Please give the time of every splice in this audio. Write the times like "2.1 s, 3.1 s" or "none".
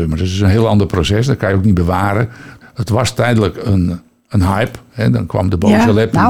2.6 s